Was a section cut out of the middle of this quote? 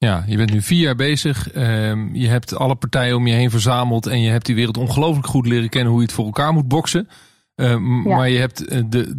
no; 0 cuts

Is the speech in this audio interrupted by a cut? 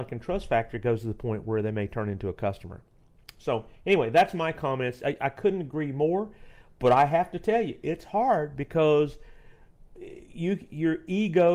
no; 0 cuts

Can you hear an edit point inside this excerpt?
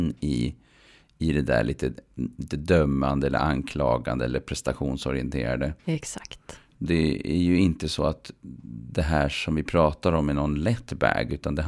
yes; 1 cut; at 5.9 s

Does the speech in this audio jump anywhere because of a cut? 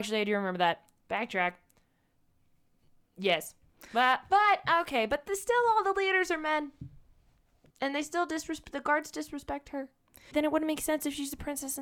yes; 2 cuts; at 7.7 s, 10.3 s

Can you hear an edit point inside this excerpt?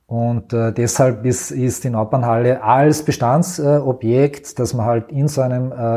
no; 0 cuts

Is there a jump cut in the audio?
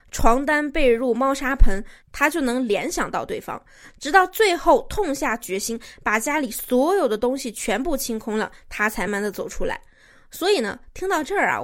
yes; 1 cut; at 9.1 s

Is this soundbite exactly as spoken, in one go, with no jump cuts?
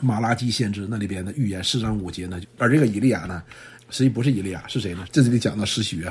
no; 3 cuts; at 2.4 s, 3.8 s, 5.0 s

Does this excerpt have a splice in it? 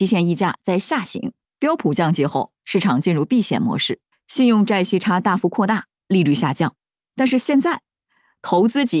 yes; 2 cuts; at 1.4 s, 4.1 s

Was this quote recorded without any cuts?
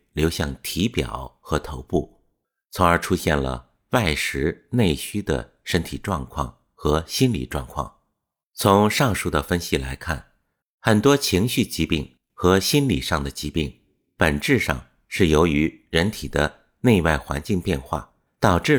yes; 0 cuts

